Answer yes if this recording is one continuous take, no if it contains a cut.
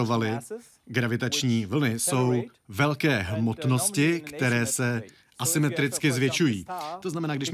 yes